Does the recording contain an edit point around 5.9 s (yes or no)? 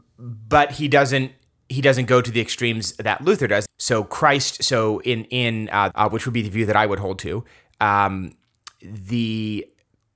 yes